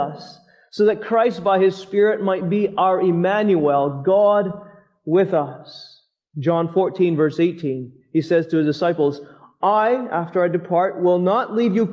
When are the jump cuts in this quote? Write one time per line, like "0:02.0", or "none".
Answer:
none